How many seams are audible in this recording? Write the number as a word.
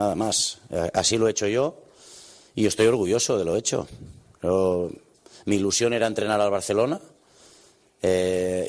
zero